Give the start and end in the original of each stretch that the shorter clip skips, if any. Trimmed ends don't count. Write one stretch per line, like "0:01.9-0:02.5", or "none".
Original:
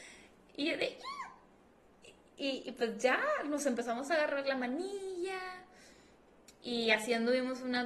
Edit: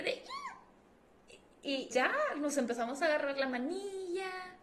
0:02.6-0:03.0

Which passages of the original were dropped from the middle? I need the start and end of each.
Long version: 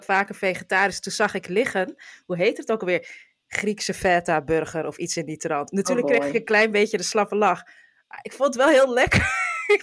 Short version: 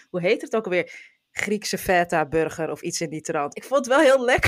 0:05.7-0:08.2

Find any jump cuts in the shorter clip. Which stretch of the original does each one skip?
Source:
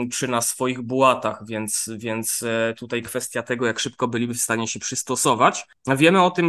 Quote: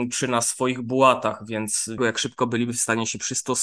0:02.0-0:03.6

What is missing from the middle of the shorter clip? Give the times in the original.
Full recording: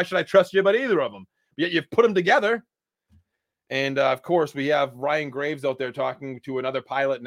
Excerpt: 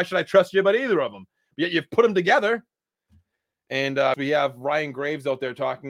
0:04.1-0:04.5

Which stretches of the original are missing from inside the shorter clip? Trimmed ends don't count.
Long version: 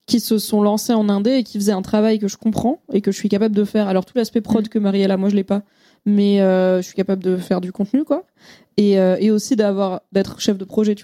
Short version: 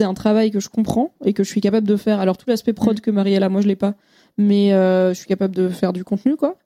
none

